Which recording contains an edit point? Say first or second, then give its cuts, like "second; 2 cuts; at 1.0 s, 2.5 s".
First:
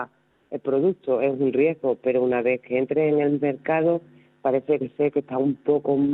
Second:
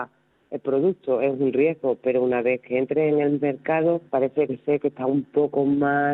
second; 1 cut; at 4.1 s